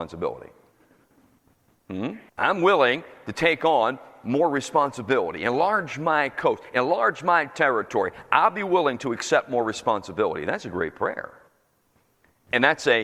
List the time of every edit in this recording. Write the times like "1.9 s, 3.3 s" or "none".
2.3 s